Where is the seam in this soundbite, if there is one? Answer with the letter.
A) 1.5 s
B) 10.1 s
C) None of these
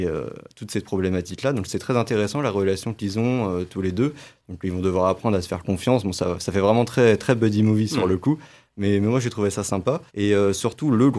B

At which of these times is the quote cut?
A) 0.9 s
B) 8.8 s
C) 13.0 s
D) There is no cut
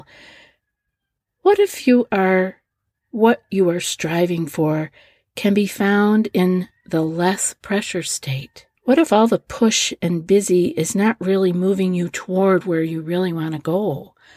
B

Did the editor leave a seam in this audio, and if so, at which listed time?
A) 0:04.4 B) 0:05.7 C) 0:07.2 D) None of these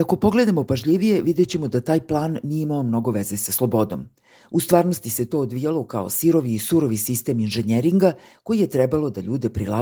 A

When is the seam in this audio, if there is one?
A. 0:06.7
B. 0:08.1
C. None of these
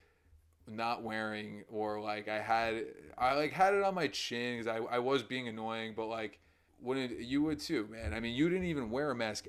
A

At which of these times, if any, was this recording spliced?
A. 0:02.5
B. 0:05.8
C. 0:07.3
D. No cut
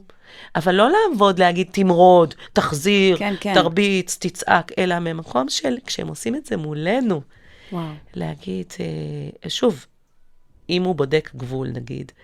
D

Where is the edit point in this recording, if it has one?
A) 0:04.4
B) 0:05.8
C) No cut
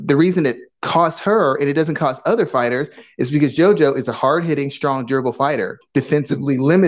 B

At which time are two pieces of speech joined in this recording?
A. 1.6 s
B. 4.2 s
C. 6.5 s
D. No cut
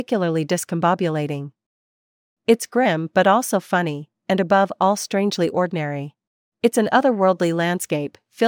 C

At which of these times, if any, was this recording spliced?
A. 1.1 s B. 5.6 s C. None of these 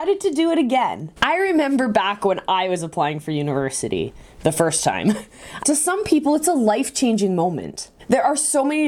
B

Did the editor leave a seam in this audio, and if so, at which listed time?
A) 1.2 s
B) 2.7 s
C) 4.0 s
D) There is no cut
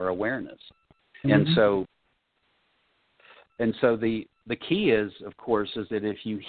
A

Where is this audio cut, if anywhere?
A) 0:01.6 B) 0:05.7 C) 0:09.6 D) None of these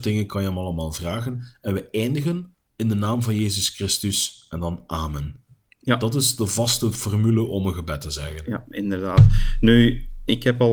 D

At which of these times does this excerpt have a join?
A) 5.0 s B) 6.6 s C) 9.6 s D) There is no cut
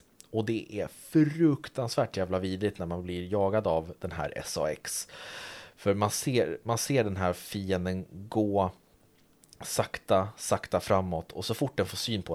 D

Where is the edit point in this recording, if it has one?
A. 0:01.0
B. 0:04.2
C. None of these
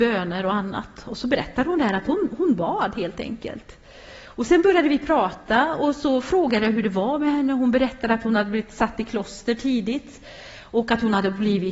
C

